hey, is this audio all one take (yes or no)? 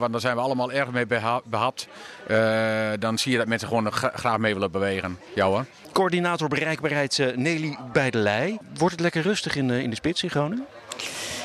yes